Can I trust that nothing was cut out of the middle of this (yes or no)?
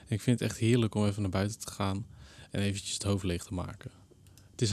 yes